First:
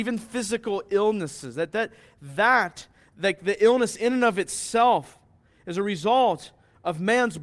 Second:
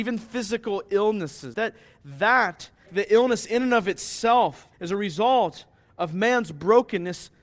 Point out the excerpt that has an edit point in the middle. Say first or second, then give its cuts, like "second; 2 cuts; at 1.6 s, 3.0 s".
second; 3 cuts; at 1.5 s, 2.9 s, 4.7 s